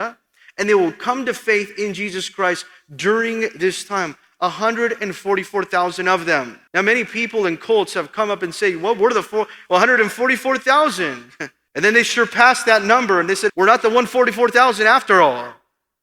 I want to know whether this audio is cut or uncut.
cut